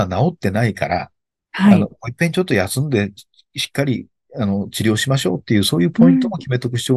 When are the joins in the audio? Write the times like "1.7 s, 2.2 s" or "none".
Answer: none